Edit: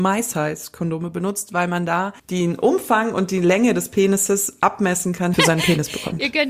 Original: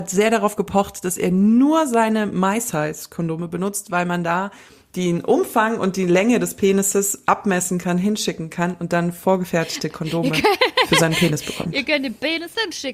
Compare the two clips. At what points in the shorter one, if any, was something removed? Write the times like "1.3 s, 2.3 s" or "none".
2.2 s, 5.3 s